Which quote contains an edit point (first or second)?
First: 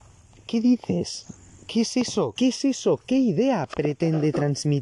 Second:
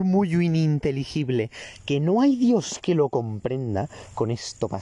first